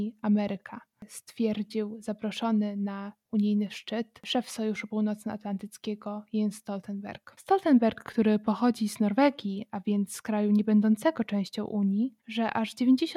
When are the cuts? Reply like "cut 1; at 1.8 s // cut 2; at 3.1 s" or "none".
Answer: cut 1; at 12.2 s